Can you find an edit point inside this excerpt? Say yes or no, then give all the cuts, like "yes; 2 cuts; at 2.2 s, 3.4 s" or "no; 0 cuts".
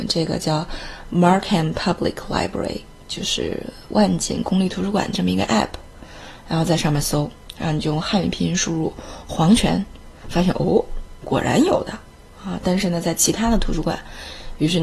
no; 0 cuts